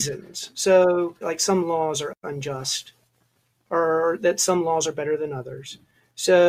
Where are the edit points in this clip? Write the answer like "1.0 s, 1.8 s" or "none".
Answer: 1.2 s